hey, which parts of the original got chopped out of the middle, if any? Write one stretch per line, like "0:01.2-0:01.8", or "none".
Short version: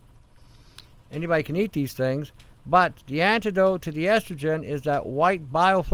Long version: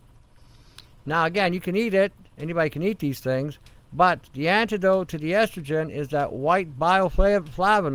0:01.0-0:02.3